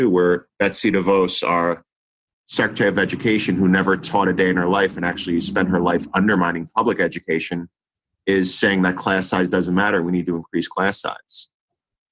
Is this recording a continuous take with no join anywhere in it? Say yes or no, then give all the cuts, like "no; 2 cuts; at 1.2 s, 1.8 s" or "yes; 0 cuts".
yes; 0 cuts